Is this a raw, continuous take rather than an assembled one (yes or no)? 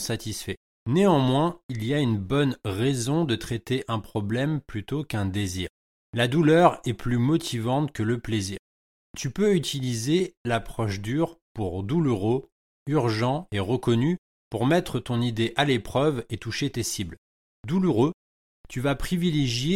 yes